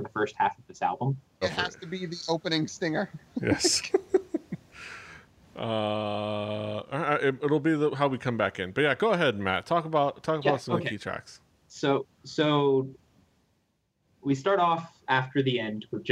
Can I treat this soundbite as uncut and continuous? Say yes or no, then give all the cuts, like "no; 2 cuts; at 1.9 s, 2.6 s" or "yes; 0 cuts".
no; 1 cut; at 1.4 s